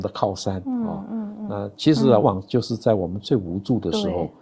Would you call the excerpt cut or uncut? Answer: cut